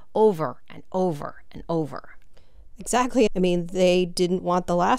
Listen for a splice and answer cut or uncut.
cut